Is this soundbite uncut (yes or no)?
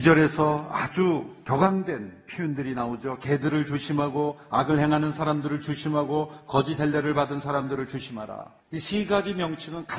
no